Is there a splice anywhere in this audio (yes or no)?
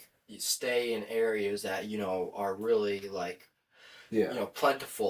no